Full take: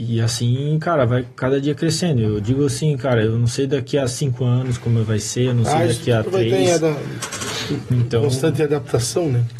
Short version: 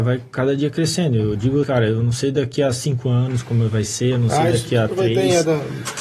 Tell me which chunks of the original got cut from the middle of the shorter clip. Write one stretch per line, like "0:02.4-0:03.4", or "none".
0:02.7-0:03.0